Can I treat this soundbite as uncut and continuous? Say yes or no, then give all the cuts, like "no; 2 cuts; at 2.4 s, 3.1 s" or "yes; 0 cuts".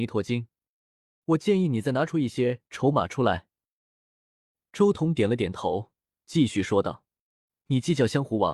no; 1 cut; at 1.2 s